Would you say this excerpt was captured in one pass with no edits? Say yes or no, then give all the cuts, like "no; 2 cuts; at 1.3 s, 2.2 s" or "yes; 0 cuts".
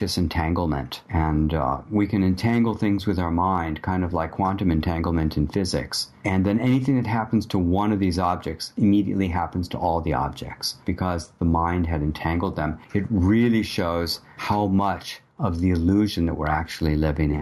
yes; 0 cuts